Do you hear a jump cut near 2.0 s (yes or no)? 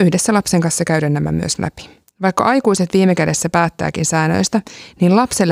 yes